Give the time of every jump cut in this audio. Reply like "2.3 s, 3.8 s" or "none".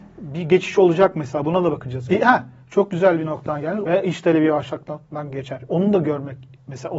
2.1 s, 3.9 s